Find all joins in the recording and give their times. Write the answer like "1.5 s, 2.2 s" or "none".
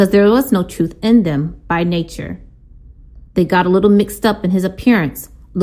3.3 s